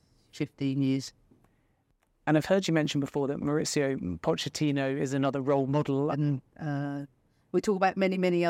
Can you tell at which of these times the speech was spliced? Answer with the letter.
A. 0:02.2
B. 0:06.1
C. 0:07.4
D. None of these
B